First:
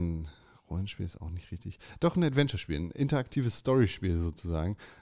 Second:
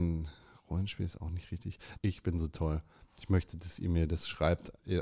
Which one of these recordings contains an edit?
second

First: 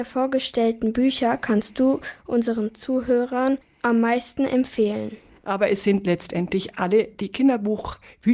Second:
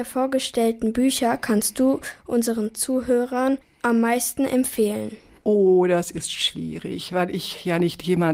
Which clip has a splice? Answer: first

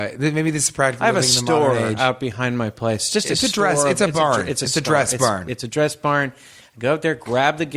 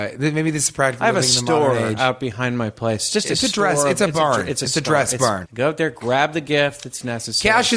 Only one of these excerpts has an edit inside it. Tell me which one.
second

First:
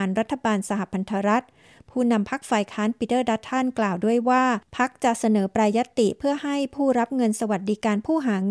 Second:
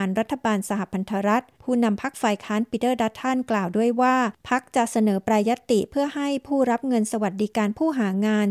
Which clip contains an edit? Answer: second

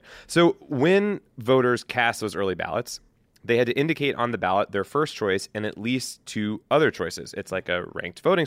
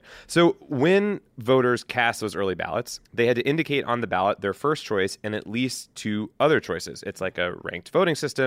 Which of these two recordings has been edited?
second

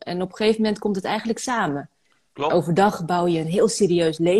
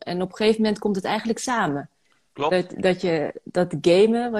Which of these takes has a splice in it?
first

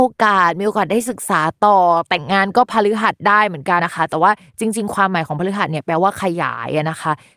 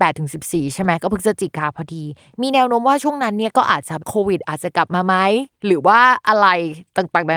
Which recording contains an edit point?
first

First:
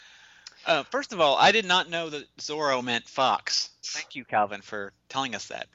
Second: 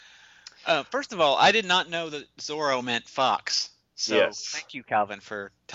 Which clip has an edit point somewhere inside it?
first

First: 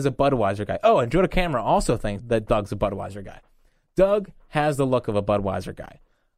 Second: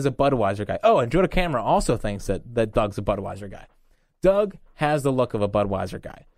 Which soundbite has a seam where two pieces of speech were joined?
first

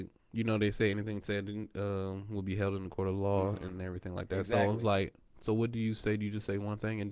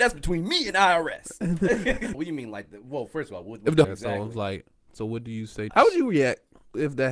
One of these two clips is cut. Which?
second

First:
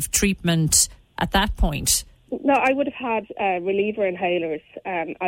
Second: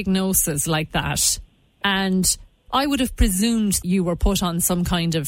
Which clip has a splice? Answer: second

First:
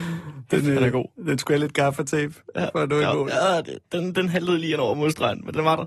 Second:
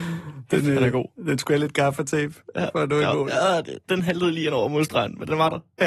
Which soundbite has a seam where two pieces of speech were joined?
second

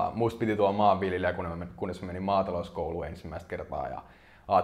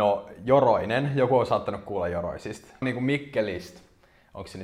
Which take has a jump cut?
second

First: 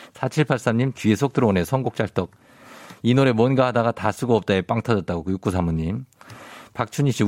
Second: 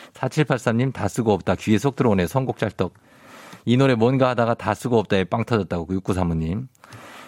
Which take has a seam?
first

